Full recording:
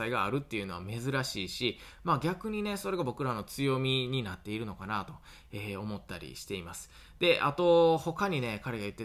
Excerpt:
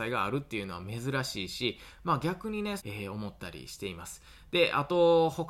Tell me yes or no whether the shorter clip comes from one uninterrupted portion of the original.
no